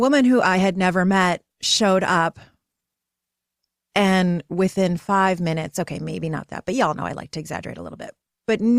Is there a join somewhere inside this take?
no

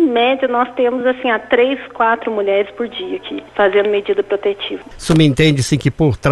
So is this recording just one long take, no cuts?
yes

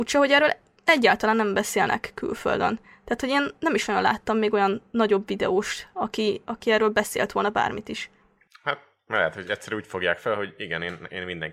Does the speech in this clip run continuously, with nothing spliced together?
yes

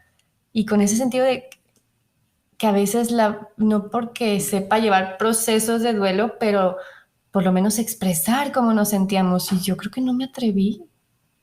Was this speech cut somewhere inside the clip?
no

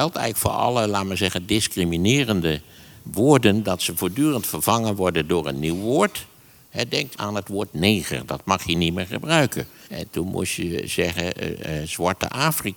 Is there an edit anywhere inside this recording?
yes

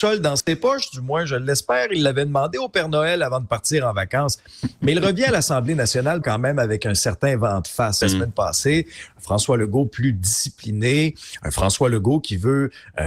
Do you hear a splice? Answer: yes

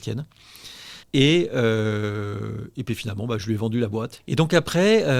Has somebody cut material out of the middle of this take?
yes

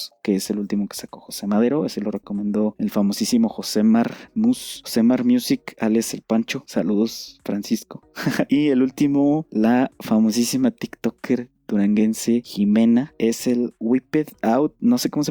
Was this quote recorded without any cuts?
yes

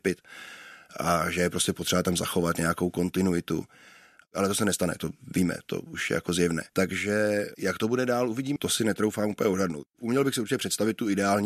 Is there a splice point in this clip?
yes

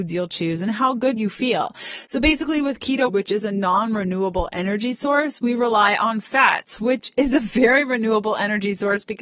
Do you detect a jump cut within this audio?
yes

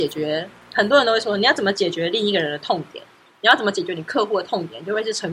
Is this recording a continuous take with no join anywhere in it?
yes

